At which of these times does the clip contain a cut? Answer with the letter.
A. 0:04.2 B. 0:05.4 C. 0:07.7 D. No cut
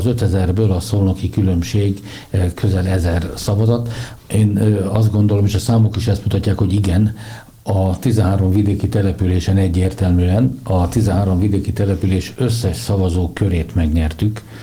A